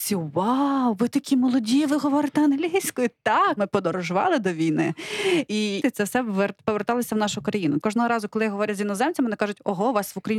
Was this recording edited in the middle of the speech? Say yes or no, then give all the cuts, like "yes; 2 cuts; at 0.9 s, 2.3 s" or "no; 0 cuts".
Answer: yes; 3 cuts; at 3.6 s, 5.8 s, 7.8 s